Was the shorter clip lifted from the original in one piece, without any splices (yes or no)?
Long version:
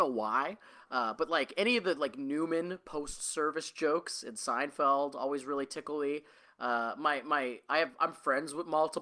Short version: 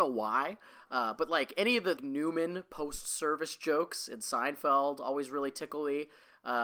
no